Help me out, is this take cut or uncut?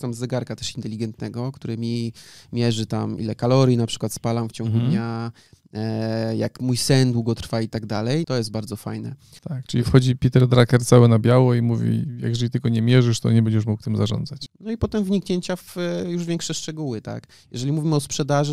cut